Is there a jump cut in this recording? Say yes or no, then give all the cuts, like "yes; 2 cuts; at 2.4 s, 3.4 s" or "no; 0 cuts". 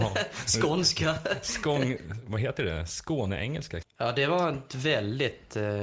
yes; 1 cut; at 3.8 s